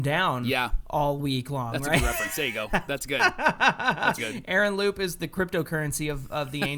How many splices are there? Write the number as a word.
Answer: one